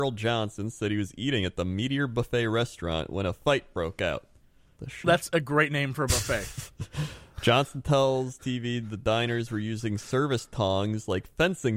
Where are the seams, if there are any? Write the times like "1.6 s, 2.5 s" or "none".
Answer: 4.8 s